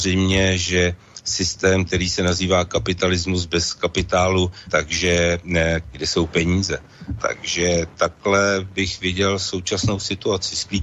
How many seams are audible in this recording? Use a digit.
3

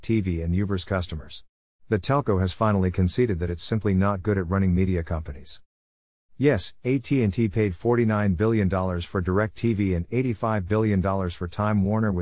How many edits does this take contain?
1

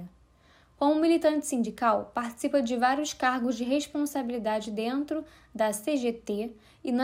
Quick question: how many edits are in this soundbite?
0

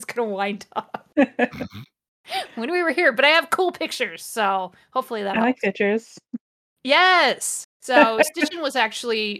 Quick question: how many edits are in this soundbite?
0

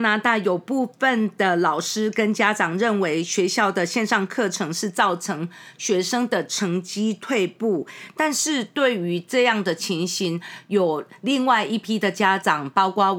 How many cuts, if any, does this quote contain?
0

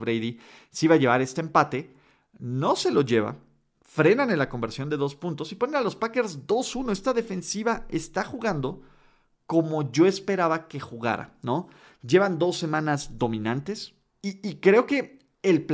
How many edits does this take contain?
0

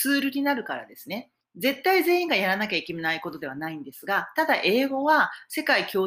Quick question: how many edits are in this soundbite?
1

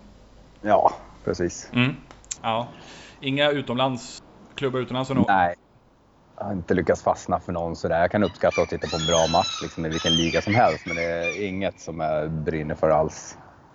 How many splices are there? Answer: 1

